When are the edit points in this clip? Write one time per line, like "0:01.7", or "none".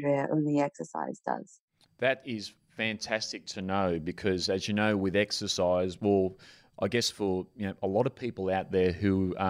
none